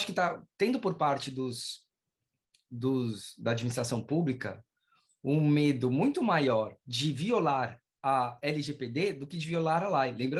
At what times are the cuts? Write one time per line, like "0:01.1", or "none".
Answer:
0:06.8